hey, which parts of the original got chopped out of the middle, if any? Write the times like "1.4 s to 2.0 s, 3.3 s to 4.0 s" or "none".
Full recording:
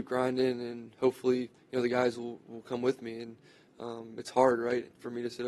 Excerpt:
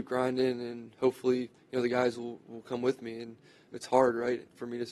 3.7 s to 4.1 s